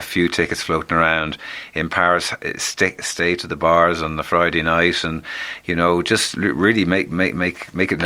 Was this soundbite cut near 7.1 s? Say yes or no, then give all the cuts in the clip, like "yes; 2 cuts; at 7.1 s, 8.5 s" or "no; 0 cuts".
no; 0 cuts